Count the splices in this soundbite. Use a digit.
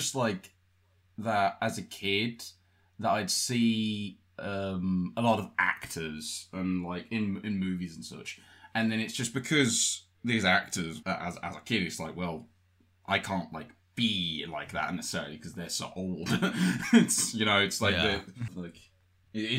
2